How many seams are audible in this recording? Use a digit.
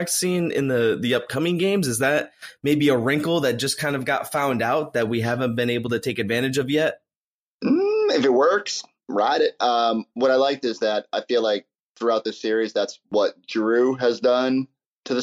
0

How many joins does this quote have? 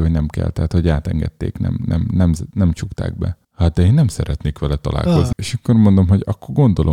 1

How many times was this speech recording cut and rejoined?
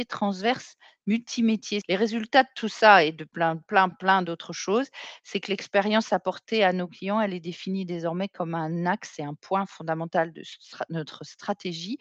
2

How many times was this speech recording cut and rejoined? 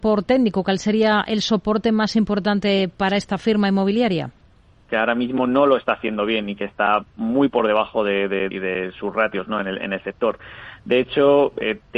2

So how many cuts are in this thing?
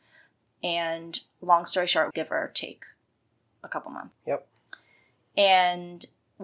2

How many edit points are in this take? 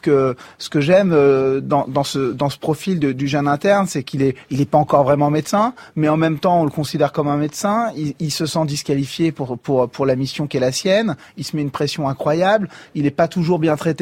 0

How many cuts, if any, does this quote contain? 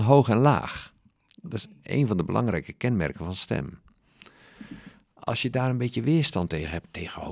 0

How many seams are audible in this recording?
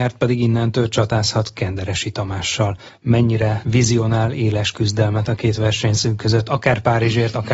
0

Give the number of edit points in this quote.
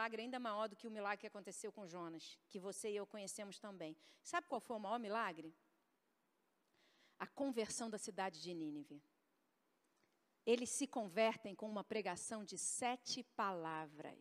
0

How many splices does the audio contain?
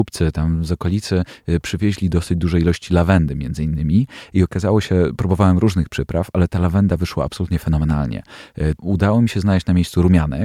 1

